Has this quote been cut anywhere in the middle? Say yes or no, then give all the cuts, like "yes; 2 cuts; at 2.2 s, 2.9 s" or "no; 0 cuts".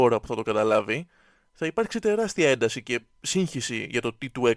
no; 0 cuts